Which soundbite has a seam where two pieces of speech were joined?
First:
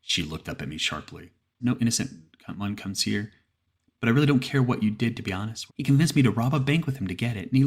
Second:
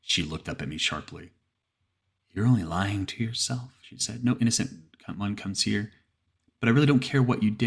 first; 2 cuts; at 1.6 s, 5.7 s

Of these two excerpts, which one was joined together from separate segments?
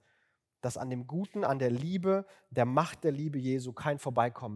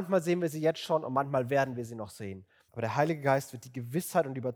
second; 1 cut; at 2.7 s

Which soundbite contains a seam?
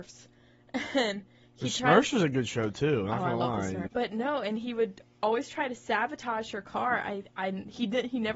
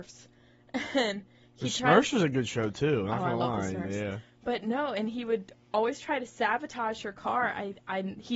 first; 1 cut; at 3.9 s

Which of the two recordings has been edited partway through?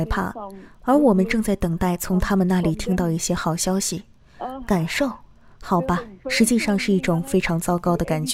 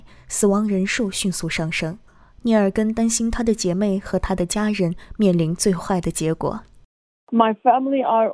first; 1 cut; at 6.2 s

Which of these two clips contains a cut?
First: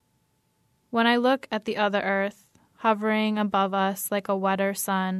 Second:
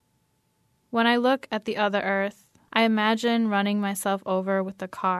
second; 1 cut; at 2.7 s

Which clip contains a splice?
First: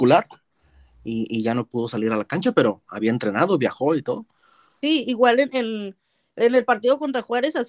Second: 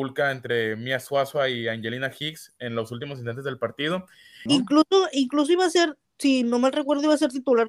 second; 1 cut; at 4.5 s

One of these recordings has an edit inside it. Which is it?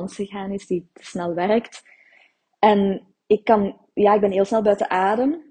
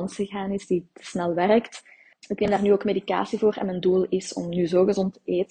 second; 1 cut; at 2.1 s

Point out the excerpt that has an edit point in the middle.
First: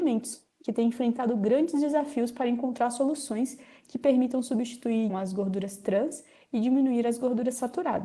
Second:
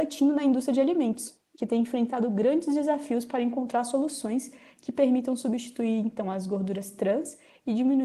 first; 1 cut; at 5.1 s

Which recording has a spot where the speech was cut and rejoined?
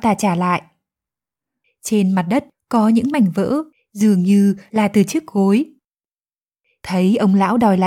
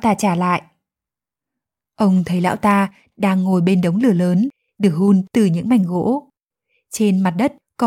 first; 1 cut; at 1.6 s

